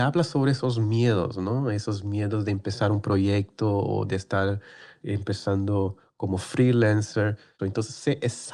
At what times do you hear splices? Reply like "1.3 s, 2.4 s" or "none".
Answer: 7.6 s